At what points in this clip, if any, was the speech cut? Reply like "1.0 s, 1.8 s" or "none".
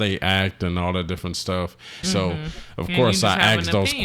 2.0 s